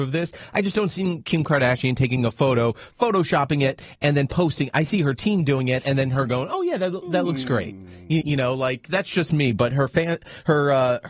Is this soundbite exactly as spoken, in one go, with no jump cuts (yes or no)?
no